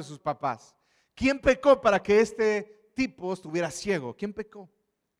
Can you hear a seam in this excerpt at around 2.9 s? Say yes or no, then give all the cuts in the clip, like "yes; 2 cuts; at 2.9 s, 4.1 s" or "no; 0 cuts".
no; 0 cuts